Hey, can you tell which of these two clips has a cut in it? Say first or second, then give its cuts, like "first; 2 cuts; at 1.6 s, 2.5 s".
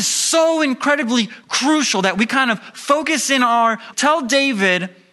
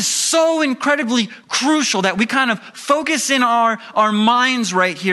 first; 1 cut; at 3.9 s